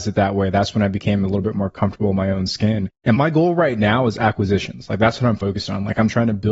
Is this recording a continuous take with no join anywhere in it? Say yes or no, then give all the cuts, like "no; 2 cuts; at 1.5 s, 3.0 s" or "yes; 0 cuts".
yes; 0 cuts